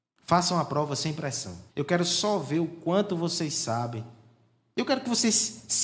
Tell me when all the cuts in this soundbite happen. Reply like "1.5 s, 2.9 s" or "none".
1.7 s